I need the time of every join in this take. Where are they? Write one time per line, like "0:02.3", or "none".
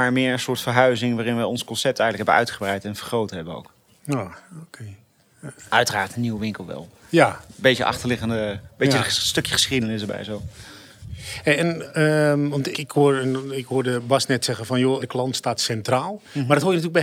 0:12.7
0:15.0